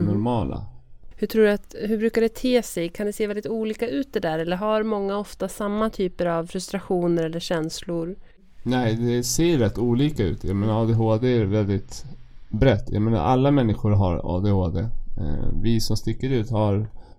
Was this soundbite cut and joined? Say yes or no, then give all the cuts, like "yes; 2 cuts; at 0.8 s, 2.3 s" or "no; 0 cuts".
yes; 1 cut; at 1.1 s